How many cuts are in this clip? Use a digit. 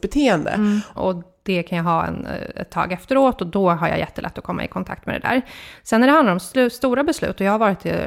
1